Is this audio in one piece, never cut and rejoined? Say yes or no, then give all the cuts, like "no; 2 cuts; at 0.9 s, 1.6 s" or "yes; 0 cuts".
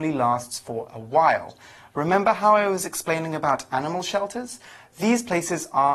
yes; 0 cuts